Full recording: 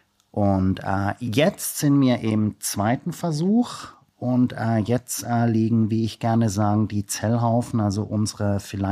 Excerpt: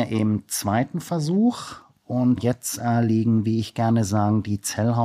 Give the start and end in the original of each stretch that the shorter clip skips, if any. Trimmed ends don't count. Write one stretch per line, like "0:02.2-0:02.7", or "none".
0:04.5-0:04.8

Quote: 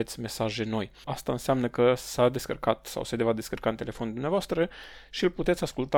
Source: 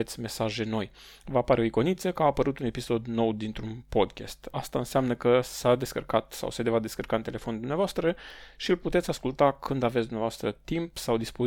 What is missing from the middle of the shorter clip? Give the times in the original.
0:01.0-0:04.5

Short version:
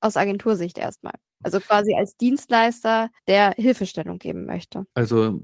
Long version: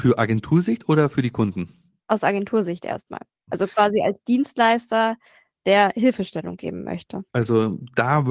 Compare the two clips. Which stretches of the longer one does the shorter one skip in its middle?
0:05.3-0:05.6

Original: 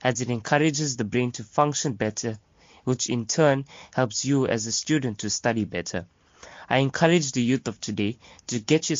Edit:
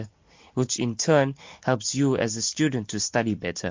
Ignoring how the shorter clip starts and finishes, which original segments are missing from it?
none

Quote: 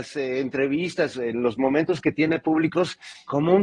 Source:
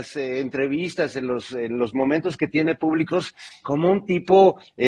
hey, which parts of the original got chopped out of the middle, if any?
0:01.1-0:01.5

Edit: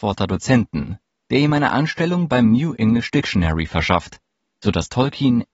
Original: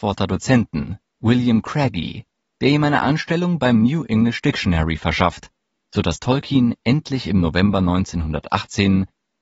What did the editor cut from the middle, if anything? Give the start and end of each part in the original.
0:01.1-0:02.4

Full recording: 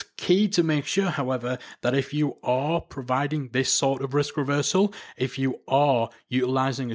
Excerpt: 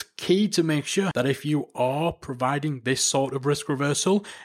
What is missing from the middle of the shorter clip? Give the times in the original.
0:01.1-0:01.8

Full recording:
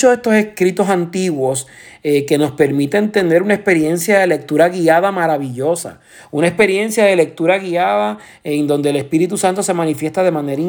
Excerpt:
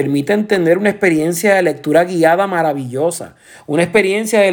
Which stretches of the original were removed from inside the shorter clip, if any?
none

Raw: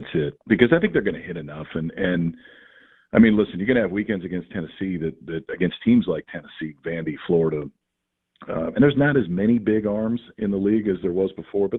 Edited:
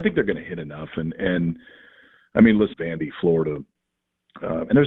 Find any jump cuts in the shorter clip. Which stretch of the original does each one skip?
0:03.5-0:06.8

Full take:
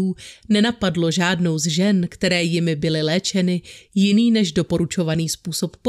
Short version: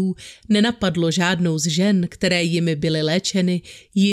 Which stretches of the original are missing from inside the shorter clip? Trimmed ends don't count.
none

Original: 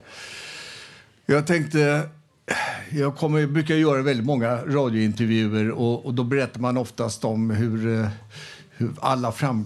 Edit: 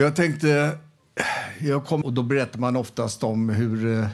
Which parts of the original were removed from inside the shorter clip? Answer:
0:03.3-0:06.0

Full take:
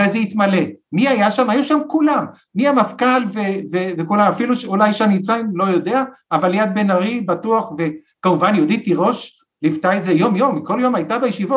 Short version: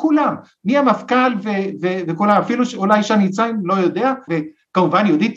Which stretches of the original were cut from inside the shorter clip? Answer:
0:06.2-0:07.8

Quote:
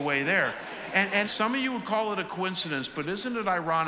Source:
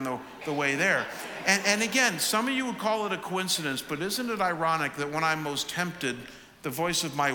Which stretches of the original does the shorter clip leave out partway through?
0:01.8-0:02.2

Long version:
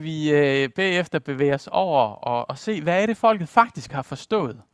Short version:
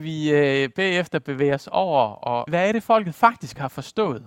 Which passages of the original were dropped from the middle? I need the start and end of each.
0:02.5-0:02.8

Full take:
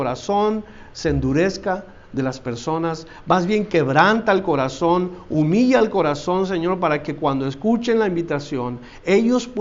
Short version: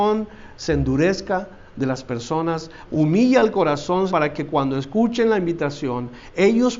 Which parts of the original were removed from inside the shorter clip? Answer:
0:03.2-0:05.2
0:06.5-0:06.8

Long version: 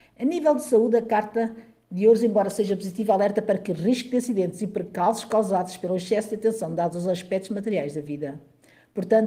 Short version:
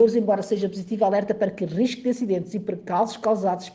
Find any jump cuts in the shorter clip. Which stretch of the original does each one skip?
none

